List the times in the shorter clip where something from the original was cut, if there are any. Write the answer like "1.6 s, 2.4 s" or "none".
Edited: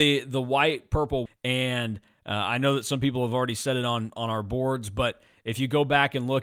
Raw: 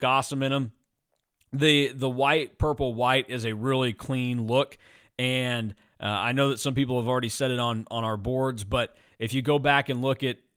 1.3 s